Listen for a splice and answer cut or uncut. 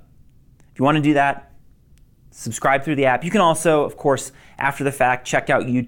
uncut